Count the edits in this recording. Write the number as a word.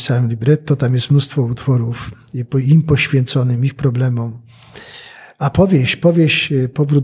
zero